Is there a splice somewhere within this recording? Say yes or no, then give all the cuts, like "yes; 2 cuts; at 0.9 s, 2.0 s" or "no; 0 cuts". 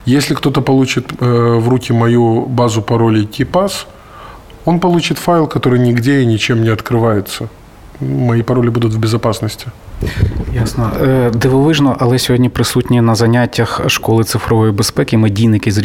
no; 0 cuts